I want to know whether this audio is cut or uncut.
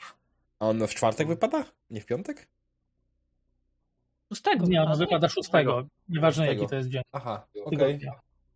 uncut